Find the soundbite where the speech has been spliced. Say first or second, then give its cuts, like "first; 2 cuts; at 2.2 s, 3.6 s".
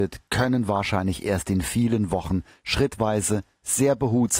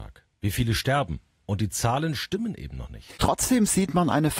second; 1 cut; at 3.2 s